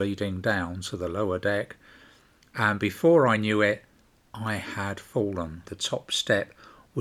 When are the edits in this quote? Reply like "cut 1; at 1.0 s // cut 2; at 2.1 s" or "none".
cut 1; at 5.6 s